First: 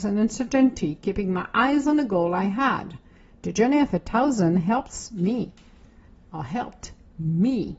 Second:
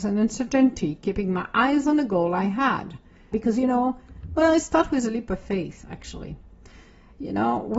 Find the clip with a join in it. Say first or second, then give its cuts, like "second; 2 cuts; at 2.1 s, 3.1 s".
second; 1 cut; at 3.3 s